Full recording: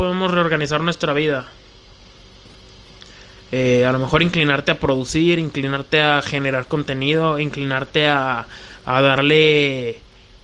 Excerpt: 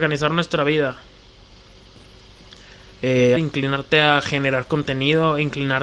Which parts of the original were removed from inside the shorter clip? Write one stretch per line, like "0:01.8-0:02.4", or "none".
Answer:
0:03.8-0:05.4